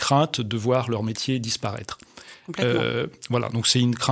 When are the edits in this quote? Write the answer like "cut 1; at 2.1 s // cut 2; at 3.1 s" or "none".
none